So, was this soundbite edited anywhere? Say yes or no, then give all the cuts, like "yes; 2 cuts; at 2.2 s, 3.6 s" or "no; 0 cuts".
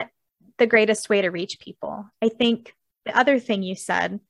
no; 0 cuts